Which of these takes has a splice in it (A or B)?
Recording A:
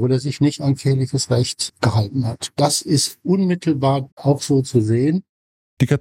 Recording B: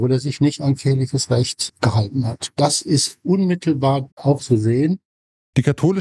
B